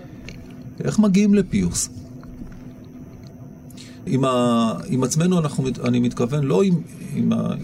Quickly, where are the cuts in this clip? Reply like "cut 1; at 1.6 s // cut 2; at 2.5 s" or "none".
cut 1; at 4.1 s

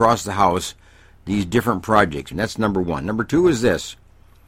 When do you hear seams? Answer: cut 1; at 2.3 s

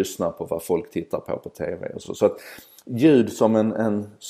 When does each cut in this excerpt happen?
none

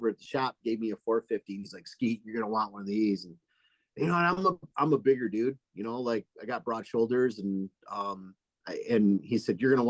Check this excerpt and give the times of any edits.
none

